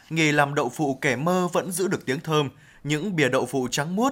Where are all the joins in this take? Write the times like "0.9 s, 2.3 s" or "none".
none